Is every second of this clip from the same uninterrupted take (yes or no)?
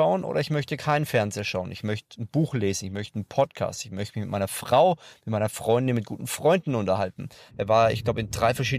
no